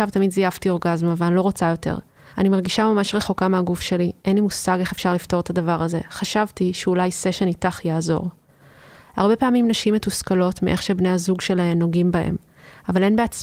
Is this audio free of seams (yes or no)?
no